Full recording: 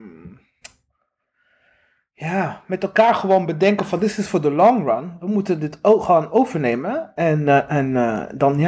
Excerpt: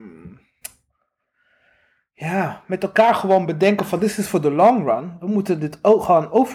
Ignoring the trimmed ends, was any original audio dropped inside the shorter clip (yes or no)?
no